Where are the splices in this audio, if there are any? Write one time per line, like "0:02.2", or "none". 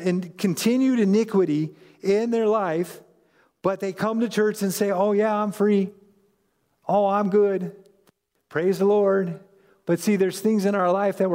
none

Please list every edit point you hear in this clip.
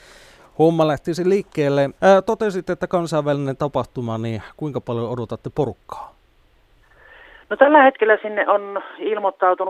0:02.0

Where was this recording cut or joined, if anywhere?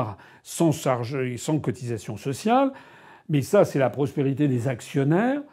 none

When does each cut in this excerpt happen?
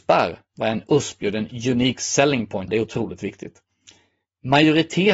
0:02.7

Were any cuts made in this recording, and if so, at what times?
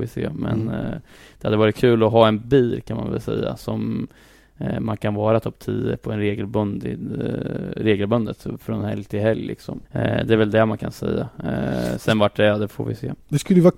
0:09.8

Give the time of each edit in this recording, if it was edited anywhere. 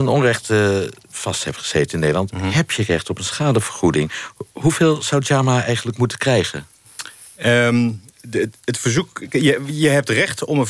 none

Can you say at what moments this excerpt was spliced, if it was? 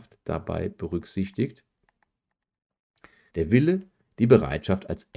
0:03.3

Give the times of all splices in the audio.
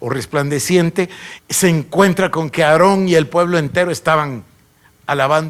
0:01.4

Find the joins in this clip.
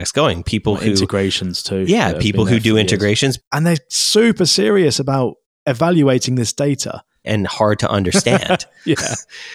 0:03.4
0:07.2

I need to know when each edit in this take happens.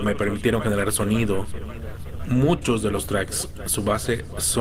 none

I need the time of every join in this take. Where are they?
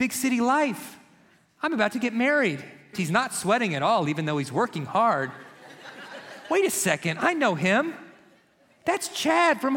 0:02.9

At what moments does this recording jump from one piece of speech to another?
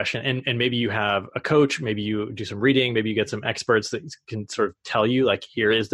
none

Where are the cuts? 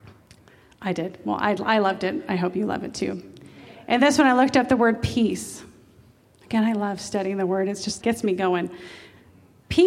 0:08.0

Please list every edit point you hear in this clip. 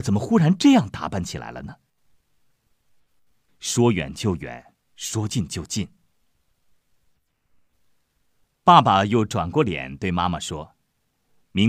0:03.5

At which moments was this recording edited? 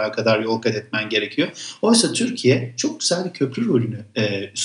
none

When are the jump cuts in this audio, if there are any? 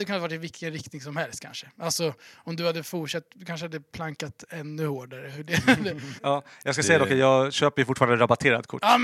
0:06.2

